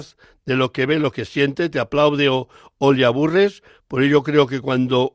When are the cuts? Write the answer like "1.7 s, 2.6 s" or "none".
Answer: none